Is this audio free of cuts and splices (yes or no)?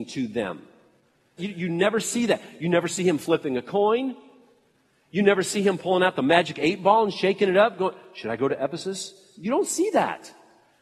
no